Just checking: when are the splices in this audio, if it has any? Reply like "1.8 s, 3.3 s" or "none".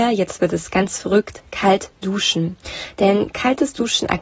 none